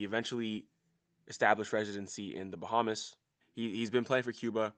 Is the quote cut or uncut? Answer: cut